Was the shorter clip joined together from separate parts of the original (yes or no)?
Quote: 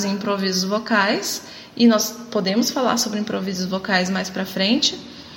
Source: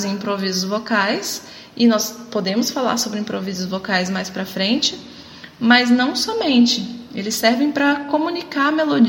no